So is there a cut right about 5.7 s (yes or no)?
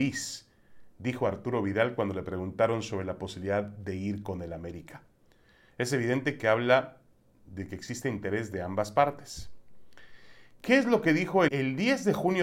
no